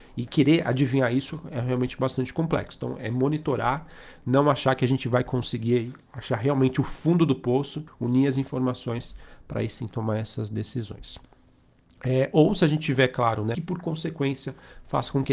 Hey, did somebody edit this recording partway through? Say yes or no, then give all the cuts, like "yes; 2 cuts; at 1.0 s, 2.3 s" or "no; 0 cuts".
yes; 2 cuts; at 7.9 s, 13.5 s